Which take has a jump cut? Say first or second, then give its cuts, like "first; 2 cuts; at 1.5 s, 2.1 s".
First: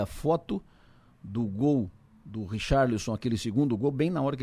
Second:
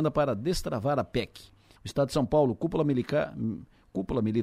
second; 1 cut; at 1.8 s